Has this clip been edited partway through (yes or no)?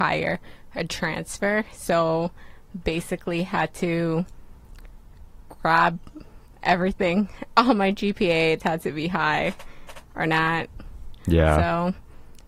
yes